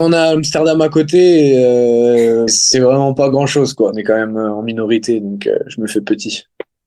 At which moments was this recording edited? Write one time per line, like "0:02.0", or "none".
0:02.5
0:03.9